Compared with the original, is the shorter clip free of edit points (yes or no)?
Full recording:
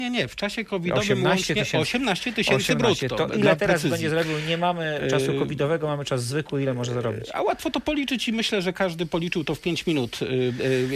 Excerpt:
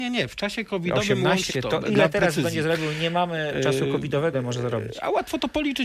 no